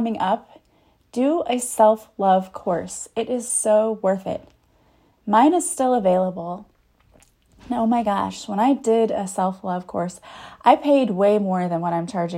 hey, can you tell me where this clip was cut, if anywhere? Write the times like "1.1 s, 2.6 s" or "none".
none